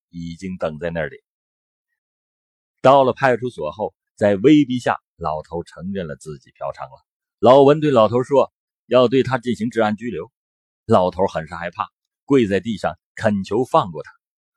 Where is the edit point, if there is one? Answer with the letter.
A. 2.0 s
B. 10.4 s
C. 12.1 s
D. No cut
A